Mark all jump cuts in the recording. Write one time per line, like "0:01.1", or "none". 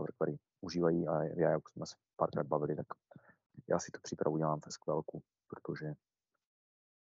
none